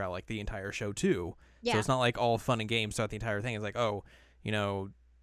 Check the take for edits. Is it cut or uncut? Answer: uncut